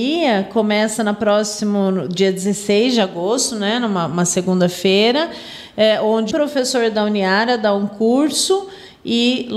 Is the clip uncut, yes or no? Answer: no